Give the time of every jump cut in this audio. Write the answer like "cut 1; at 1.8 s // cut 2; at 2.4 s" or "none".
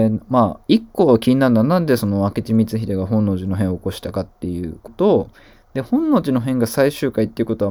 cut 1; at 4.9 s